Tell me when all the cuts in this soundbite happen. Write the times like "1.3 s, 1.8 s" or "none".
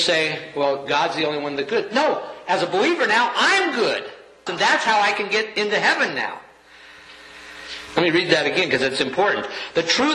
4.5 s, 7.9 s